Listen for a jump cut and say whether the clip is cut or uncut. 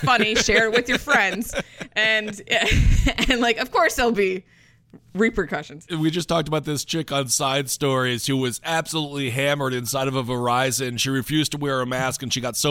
uncut